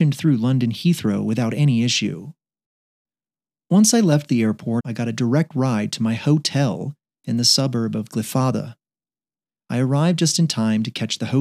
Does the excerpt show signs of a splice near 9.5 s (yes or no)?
no